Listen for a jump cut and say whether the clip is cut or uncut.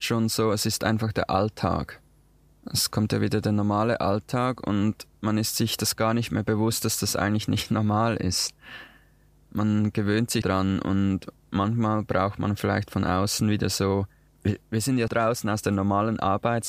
cut